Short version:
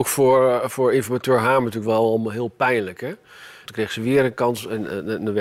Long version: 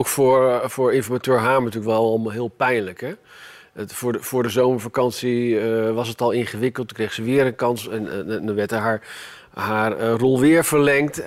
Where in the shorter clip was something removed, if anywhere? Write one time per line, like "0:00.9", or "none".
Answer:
0:03.7

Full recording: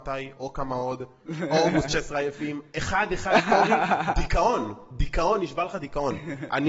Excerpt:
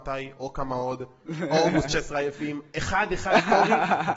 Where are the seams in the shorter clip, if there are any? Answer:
none

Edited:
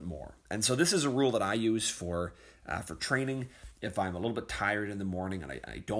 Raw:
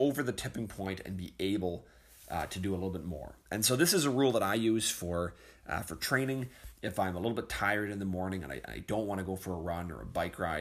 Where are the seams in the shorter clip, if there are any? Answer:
none

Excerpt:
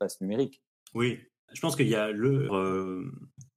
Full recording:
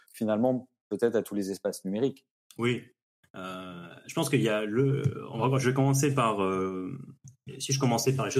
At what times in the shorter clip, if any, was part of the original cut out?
0:01.5
0:02.5

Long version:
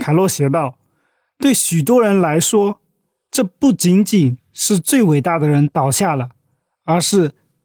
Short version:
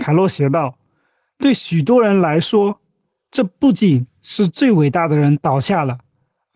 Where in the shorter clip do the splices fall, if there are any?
0:03.7

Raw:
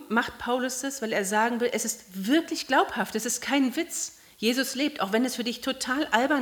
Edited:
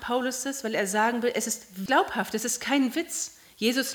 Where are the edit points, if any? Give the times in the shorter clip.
0:01.9

